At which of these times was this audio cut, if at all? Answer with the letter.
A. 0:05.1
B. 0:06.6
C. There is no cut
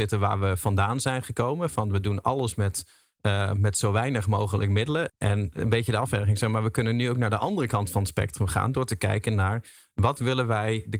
A